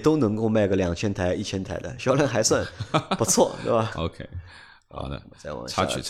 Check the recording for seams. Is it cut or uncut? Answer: uncut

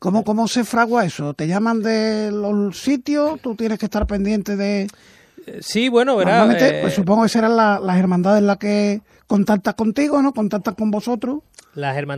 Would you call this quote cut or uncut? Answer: uncut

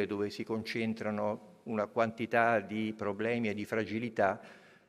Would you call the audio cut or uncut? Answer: uncut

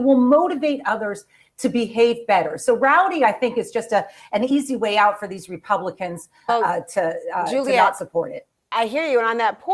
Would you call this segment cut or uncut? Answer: cut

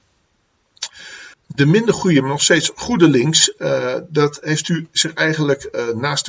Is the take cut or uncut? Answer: cut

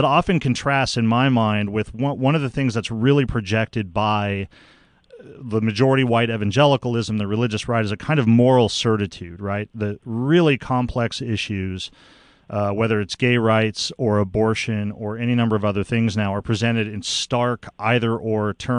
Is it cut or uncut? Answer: uncut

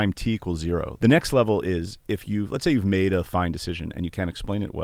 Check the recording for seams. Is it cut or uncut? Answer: cut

